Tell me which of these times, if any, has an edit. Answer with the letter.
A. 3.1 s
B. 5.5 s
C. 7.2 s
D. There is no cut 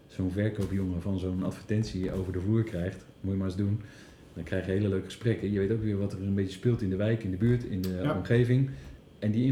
D